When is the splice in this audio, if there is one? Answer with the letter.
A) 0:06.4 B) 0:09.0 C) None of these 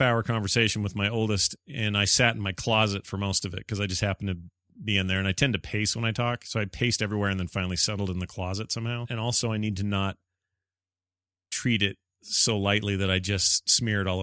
B